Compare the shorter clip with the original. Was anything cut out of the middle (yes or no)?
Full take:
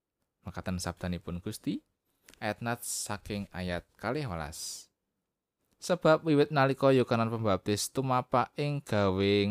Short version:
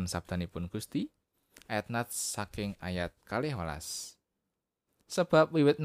no